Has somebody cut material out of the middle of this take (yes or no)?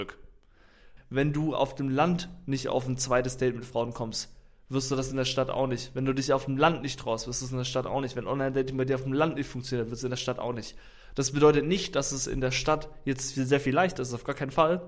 yes